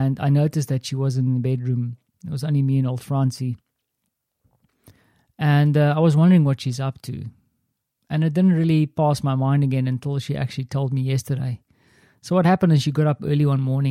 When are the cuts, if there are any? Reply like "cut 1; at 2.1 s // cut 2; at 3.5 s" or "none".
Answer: none